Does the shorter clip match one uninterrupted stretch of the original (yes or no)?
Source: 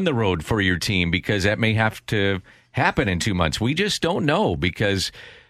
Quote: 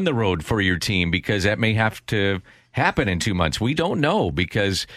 no